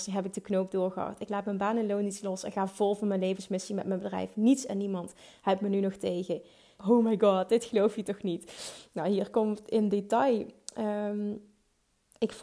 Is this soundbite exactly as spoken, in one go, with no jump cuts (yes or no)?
no